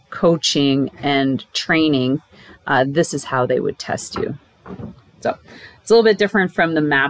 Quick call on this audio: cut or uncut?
uncut